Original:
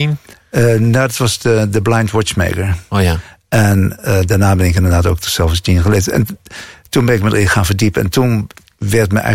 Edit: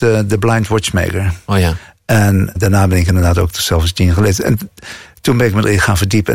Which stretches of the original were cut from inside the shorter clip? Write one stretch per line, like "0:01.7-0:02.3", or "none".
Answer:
0:04.0-0:04.2